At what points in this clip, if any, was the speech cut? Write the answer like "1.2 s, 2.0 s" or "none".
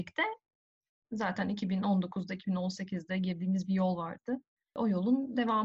1.0 s

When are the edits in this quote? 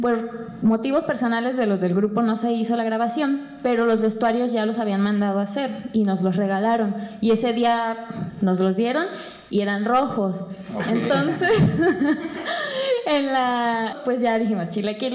13.9 s

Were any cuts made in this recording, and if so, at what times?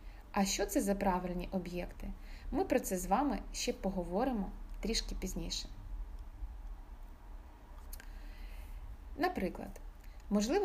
9.2 s

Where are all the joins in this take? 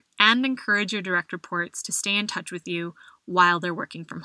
none

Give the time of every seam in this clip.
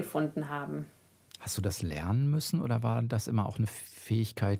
none

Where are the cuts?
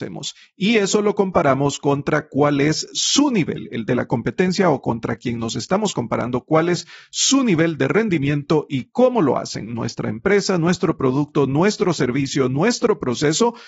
none

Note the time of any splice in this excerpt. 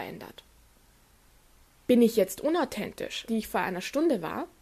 3.3 s

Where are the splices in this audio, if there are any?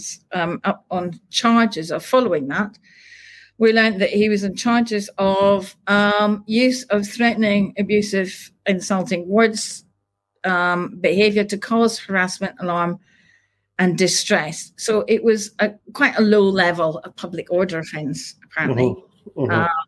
none

